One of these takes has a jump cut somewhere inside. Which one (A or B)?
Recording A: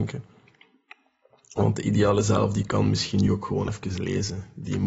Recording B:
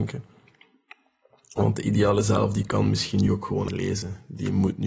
B